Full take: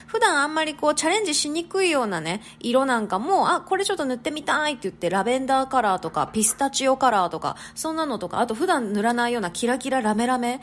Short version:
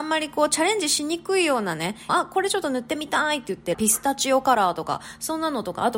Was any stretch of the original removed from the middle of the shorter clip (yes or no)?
yes